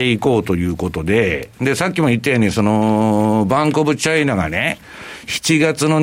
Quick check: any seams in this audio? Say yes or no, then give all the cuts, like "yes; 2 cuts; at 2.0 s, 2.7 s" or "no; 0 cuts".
no; 0 cuts